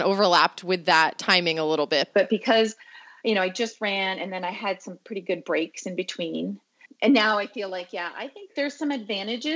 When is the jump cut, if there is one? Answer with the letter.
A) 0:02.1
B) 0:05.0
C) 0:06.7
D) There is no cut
A